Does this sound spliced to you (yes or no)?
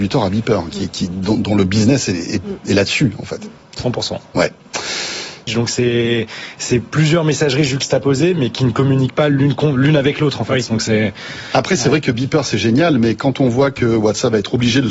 yes